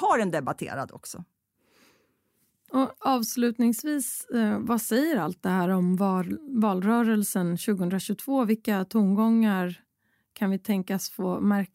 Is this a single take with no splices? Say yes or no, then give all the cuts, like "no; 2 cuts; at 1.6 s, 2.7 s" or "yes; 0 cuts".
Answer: yes; 0 cuts